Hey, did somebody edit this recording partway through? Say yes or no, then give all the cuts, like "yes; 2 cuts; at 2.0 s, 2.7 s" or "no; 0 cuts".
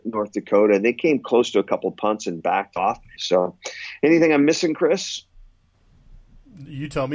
yes; 1 cut; at 3.2 s